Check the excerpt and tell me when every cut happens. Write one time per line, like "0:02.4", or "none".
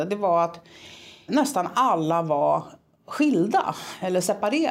0:01.3